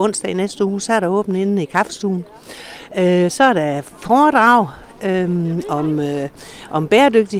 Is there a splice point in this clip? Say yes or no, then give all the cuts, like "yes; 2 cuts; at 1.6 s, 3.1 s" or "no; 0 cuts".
no; 0 cuts